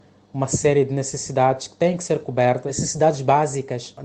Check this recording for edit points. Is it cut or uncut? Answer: uncut